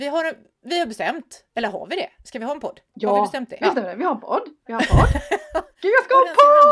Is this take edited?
yes; 1 cut; at 3.6 s

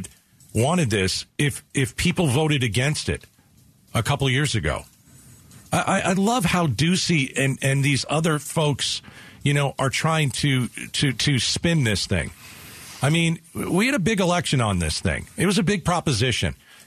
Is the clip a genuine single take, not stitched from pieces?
yes; 0 cuts

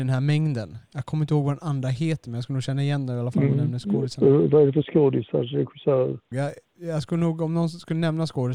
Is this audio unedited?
no; 1 cut; at 6.3 s

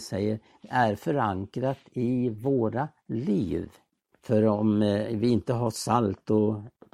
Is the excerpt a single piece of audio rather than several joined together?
no; 1 cut; at 4.1 s

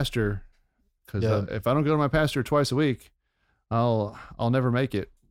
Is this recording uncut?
yes; 0 cuts

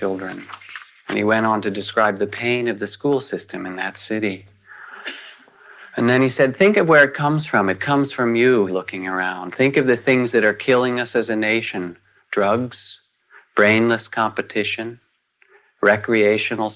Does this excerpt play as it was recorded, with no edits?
no; 1 cut; at 8.7 s

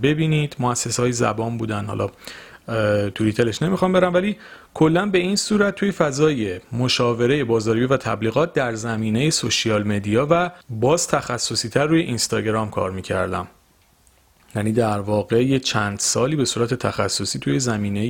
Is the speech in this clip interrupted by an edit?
yes; 1 cut; at 10.6 s

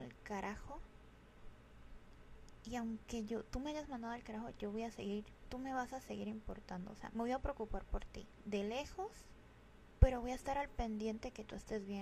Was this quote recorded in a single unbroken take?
no; 1 cut; at 7.1 s

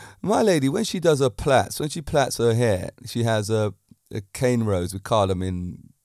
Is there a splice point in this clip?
no; 0 cuts

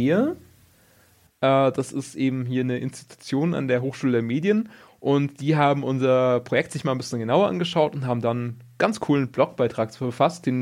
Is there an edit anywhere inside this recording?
yes; 1 cut; at 1.3 s

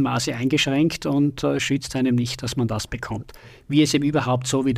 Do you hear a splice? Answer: no; 0 cuts

